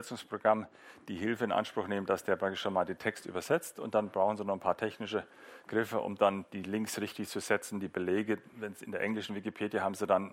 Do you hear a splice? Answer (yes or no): no